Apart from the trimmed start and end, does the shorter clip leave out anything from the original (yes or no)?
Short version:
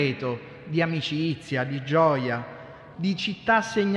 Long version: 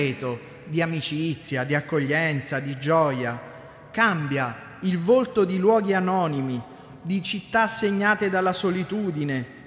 yes